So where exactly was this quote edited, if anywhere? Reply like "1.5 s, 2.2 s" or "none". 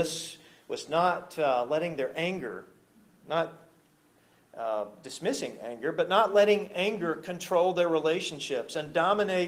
none